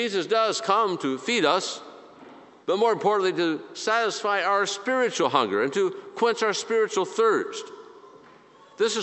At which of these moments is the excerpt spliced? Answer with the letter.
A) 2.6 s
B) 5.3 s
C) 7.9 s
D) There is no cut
A